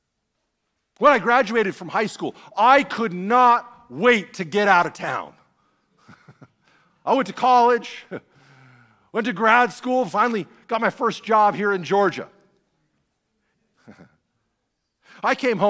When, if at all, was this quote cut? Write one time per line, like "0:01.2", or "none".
0:13.5